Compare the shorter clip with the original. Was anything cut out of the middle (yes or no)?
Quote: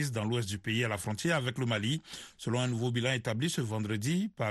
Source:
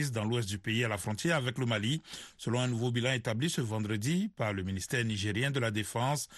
no